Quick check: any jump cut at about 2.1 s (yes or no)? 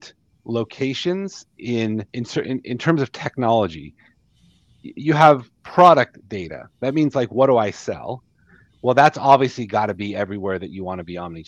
yes